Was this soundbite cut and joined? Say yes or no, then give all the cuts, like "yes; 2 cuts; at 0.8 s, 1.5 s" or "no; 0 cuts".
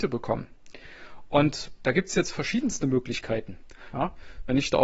yes; 1 cut; at 3.9 s